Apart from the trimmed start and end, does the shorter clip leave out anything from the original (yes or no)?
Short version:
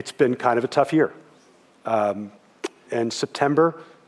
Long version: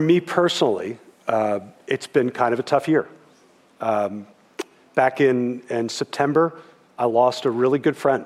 yes